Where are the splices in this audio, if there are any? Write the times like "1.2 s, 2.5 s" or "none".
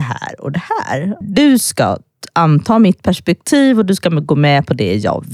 1.2 s